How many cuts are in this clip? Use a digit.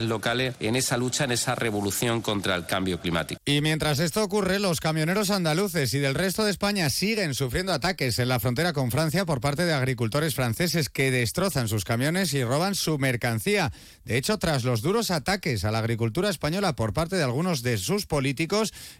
1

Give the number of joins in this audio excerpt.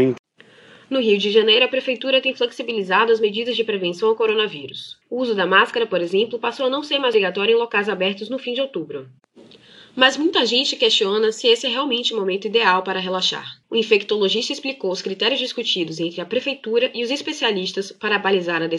2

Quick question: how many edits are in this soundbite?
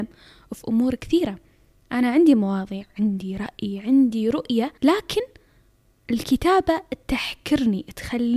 1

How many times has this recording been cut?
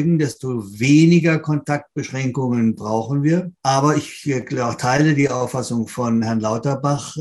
1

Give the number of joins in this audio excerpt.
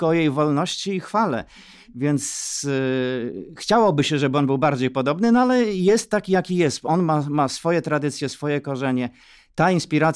0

